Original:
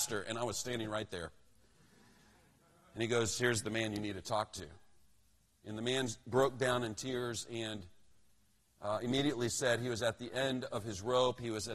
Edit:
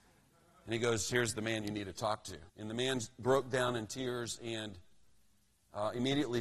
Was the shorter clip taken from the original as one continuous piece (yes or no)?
no